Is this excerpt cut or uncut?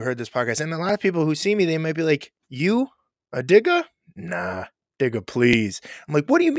cut